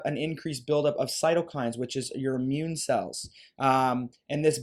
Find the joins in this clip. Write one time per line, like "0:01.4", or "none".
none